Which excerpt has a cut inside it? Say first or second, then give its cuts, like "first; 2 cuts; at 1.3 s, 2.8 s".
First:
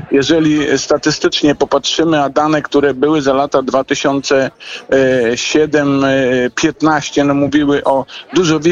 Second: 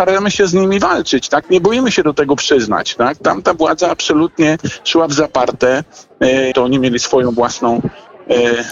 second; 2 cuts; at 1.4 s, 6.5 s